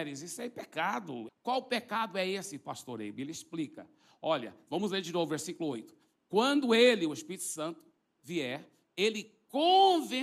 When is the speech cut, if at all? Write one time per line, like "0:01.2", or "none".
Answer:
0:01.3